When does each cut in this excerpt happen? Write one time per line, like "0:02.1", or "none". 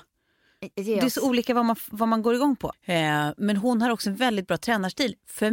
0:02.7